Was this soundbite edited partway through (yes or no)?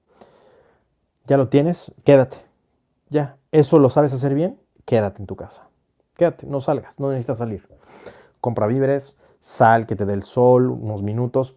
yes